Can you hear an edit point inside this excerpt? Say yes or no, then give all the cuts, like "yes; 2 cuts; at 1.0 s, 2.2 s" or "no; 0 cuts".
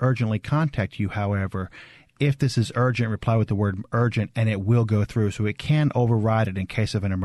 yes; 1 cut; at 2.2 s